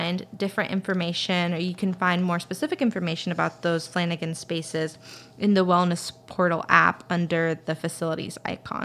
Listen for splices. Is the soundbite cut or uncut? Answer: uncut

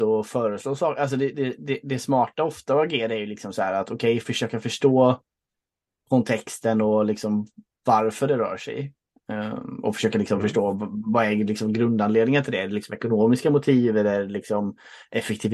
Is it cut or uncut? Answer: uncut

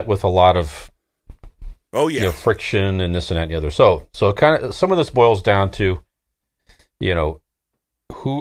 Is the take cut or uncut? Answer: uncut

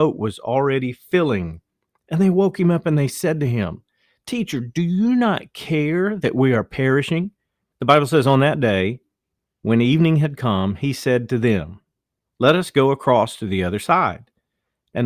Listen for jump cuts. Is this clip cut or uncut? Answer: cut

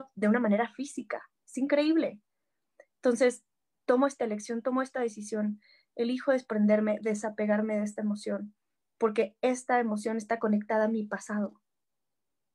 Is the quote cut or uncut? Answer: uncut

